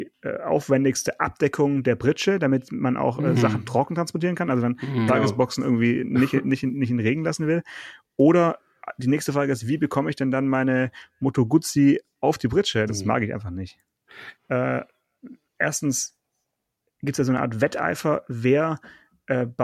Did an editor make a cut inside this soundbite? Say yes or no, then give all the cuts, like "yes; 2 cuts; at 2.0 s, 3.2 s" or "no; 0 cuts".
yes; 3 cuts; at 5.1 s, 12.9 s, 14.3 s